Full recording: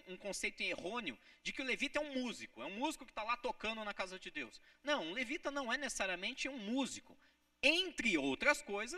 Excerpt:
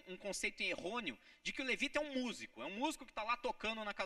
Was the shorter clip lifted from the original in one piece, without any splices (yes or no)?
yes